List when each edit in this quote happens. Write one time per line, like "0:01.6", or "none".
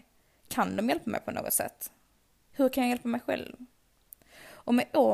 none